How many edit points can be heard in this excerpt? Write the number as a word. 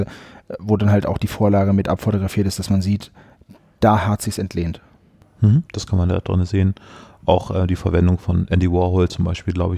one